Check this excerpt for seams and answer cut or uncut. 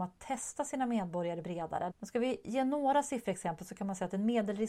cut